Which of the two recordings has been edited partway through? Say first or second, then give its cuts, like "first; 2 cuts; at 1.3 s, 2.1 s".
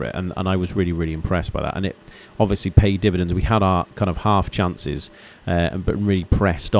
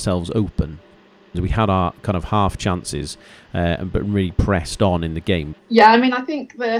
second; 2 cuts; at 1.3 s, 5.5 s